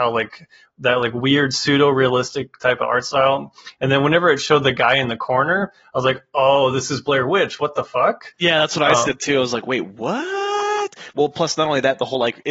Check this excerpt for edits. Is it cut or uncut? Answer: uncut